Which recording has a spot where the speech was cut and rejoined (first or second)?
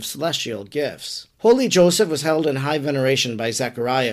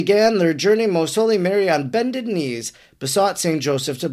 first